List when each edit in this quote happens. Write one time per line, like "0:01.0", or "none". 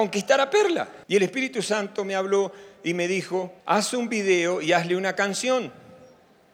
0:01.0
0:03.6